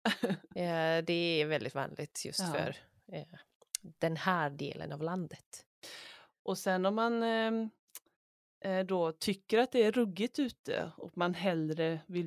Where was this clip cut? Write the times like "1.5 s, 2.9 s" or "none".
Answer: none